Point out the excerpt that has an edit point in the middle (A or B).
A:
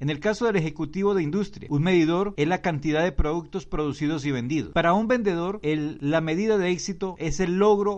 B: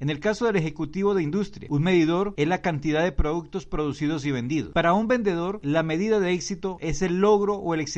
B